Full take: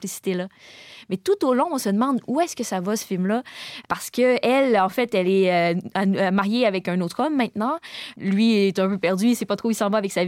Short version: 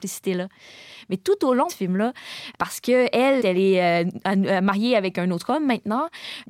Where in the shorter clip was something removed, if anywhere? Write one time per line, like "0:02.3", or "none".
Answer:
0:01.7
0:03.4